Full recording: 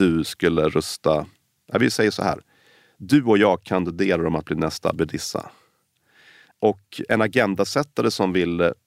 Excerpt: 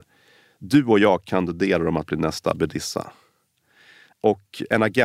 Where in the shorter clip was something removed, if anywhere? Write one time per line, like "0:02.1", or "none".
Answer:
none